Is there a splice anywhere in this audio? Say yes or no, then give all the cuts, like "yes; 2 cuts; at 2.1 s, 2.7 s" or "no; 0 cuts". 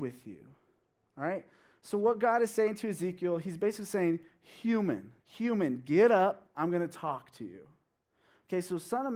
yes; 1 cut; at 5.2 s